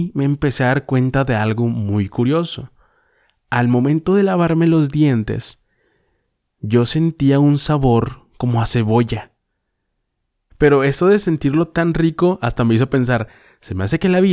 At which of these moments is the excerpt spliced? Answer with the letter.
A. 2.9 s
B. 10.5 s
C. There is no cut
B